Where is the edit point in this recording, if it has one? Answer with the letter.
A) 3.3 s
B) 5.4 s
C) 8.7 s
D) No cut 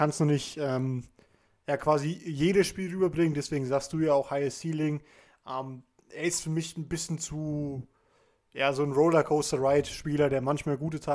D